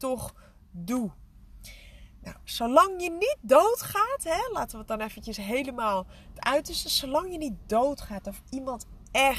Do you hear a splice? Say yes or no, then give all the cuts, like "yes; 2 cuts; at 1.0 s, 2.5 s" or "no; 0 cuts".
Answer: no; 0 cuts